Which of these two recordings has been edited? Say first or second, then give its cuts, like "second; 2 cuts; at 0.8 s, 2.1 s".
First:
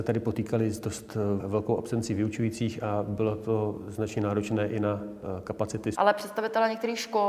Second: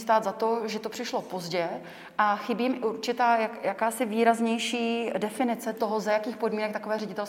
first; 2 cuts; at 1.4 s, 5.9 s